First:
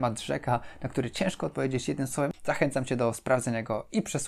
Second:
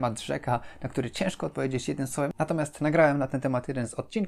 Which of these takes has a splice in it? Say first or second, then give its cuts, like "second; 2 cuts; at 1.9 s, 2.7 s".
first; 1 cut; at 2.3 s